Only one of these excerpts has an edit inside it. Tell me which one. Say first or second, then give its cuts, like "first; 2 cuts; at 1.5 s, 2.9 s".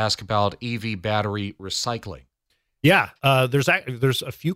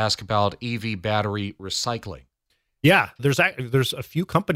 second; 1 cut; at 3.2 s